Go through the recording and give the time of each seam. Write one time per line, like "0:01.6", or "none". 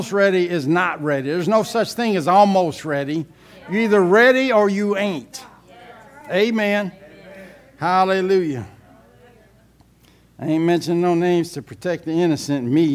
none